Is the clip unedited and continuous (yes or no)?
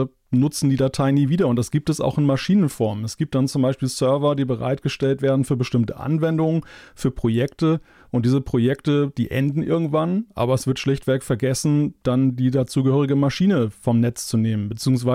yes